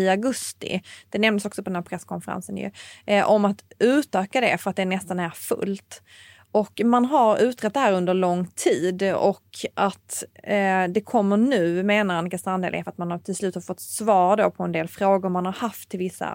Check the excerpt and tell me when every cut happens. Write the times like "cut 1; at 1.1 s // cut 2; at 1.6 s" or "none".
none